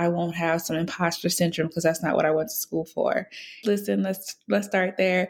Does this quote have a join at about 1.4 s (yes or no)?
no